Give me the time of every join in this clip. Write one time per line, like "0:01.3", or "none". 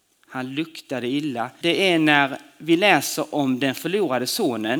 0:01.6

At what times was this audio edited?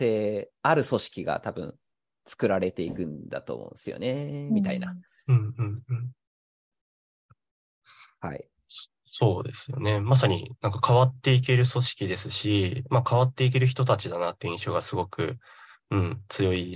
none

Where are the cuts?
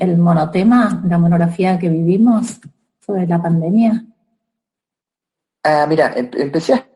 none

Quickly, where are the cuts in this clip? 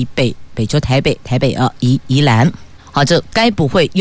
none

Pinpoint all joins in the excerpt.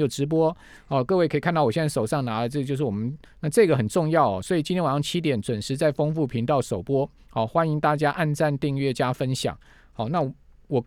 0:03.3

